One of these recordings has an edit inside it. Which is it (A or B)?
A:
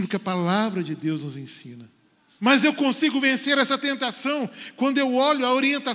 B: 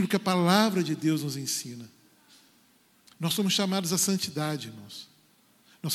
A